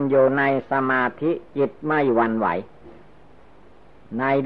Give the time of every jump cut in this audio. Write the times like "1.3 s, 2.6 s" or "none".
none